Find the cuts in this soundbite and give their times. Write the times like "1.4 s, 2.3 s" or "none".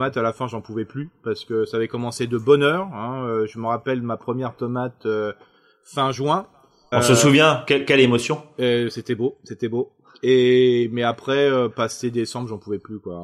6.9 s